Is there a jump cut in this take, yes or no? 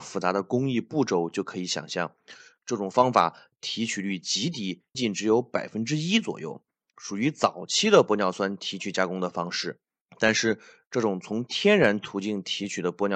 yes